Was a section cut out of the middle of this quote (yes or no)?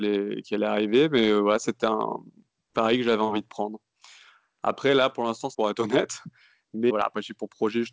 yes